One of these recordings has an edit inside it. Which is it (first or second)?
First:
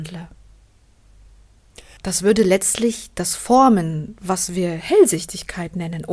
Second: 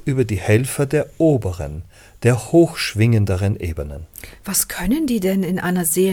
first